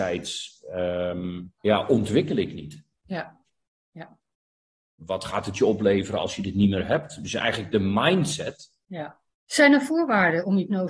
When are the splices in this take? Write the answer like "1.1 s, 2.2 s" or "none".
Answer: 1.6 s, 5.0 s, 9.3 s